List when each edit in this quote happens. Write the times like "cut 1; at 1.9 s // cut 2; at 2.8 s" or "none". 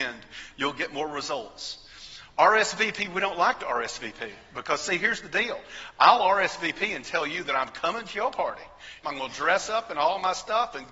cut 1; at 9.0 s